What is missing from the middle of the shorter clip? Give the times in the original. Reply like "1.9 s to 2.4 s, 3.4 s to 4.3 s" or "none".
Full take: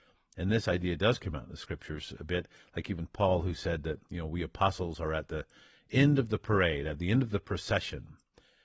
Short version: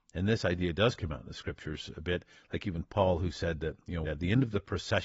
4.3 s to 6.8 s